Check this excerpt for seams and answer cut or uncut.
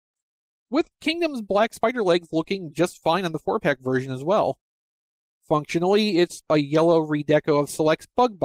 cut